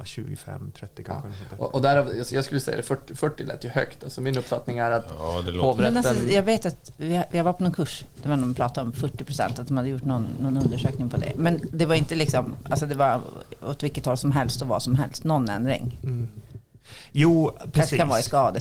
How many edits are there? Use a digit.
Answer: 0